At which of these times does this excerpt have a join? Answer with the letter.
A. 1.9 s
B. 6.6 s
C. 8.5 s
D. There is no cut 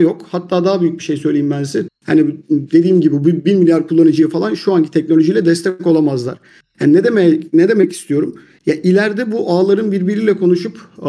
A